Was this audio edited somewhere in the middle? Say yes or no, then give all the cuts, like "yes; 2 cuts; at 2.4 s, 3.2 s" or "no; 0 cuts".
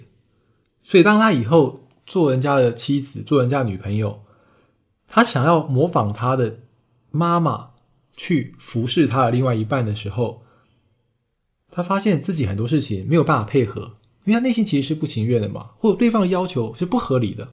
no; 0 cuts